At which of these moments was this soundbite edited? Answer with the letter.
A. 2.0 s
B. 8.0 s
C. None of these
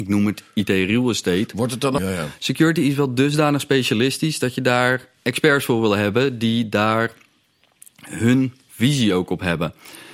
A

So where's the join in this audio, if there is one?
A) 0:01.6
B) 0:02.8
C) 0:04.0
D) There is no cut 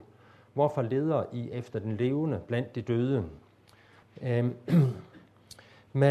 C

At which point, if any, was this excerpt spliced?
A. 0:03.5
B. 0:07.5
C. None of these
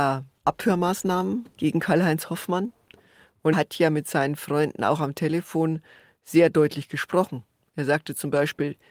A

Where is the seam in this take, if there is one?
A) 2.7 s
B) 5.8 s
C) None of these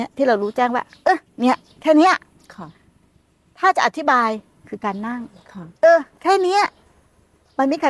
B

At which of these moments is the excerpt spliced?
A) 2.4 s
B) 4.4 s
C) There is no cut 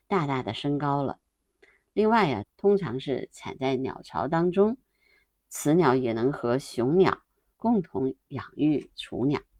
A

